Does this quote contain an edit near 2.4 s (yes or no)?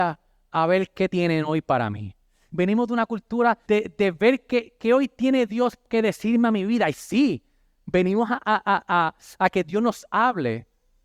no